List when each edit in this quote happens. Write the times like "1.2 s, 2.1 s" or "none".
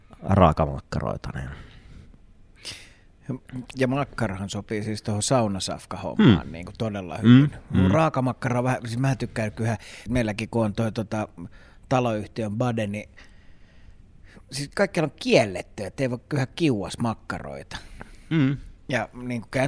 10.1 s